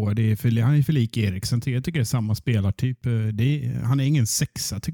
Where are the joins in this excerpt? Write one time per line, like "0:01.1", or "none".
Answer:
none